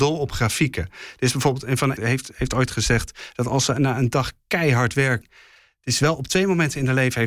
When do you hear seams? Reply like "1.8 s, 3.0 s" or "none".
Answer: 2.0 s, 5.2 s